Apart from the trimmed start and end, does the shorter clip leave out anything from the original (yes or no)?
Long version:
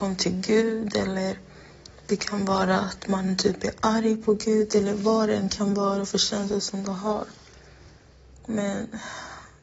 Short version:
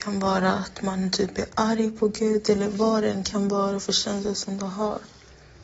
no